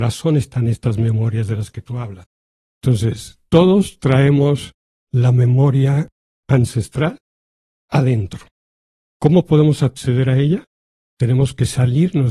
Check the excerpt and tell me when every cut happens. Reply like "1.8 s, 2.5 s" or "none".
2.7 s